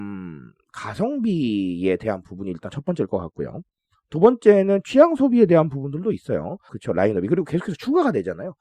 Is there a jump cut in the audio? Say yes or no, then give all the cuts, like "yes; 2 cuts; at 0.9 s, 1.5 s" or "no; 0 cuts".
yes; 1 cut; at 6.7 s